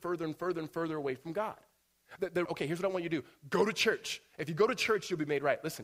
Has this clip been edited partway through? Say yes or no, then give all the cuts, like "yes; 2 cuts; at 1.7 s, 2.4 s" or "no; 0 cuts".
yes; 1 cut; at 2.5 s